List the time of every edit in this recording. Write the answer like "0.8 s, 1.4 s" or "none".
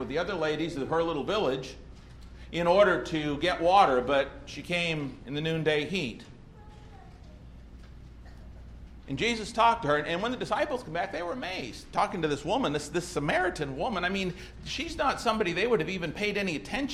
none